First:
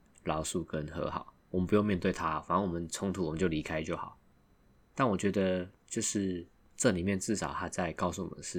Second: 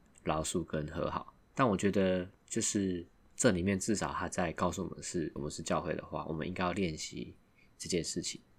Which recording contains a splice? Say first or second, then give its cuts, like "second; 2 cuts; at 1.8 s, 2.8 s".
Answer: second; 2 cuts; at 1.4 s, 5.4 s